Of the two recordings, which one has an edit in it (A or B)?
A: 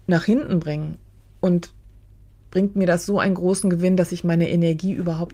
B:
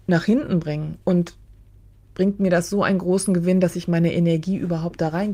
B